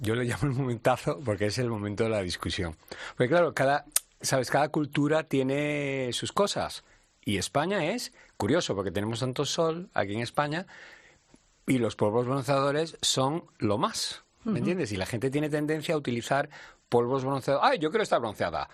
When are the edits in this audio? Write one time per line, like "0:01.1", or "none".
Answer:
none